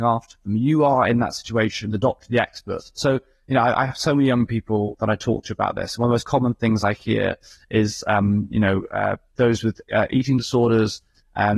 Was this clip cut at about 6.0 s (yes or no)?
no